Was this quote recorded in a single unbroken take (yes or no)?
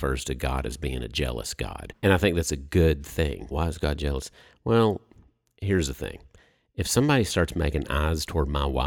no